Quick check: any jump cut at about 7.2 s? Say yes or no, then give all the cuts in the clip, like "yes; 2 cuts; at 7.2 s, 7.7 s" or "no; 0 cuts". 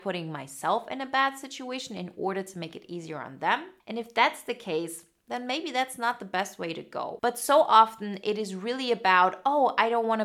yes; 2 cuts; at 3.8 s, 7.2 s